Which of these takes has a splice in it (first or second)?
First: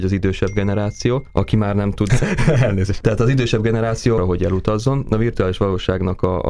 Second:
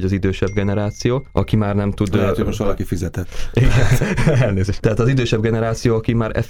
first